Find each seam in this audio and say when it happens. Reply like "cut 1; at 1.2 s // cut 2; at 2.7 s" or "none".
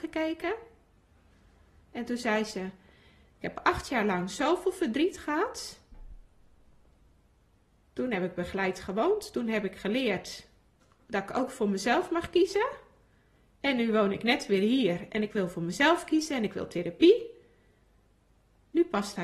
none